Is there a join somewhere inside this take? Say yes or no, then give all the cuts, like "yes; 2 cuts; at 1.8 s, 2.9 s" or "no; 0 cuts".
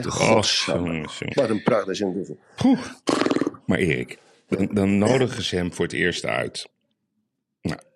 yes; 1 cut; at 1.3 s